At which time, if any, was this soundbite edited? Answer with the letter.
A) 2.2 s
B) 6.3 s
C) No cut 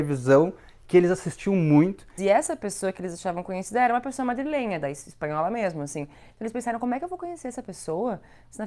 A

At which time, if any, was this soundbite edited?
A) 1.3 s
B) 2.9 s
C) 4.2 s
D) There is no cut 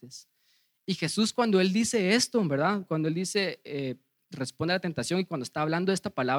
D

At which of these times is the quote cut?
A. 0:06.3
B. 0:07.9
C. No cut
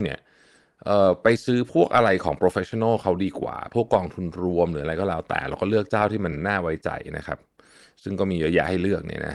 C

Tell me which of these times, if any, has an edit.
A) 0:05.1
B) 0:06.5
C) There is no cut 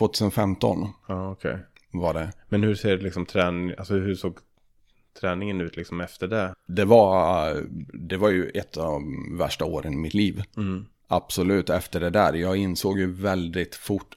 B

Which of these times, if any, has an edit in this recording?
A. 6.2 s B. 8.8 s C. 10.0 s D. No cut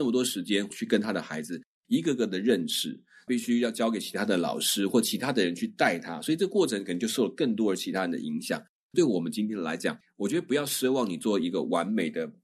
D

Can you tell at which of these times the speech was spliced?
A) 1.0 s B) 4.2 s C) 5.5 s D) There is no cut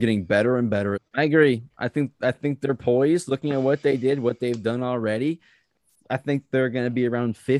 A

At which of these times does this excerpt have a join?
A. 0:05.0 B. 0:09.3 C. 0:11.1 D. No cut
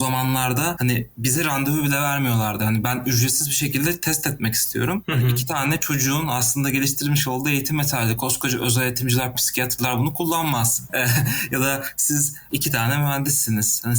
B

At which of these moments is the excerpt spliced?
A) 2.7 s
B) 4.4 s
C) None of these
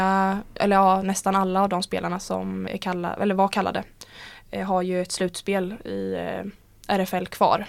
A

